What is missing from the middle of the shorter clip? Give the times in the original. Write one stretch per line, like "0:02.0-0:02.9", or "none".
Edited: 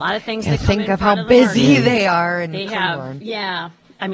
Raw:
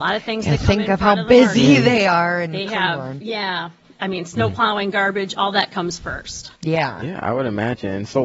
none